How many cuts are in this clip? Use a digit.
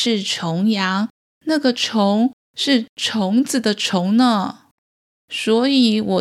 1